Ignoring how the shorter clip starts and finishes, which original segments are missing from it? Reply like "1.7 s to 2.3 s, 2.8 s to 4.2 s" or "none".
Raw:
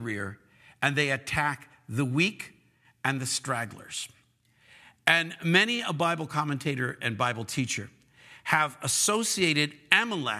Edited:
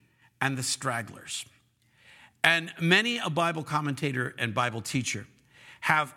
none